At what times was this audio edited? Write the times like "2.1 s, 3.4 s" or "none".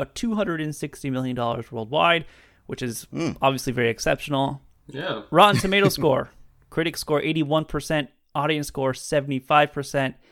none